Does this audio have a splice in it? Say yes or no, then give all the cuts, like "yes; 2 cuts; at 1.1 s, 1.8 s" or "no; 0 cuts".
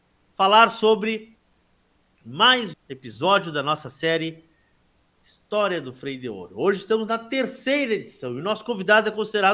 yes; 1 cut; at 2.7 s